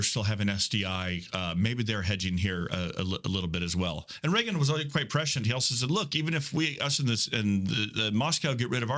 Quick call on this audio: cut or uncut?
uncut